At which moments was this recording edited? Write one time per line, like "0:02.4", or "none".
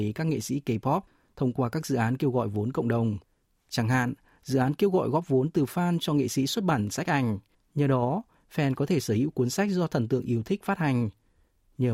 0:07.5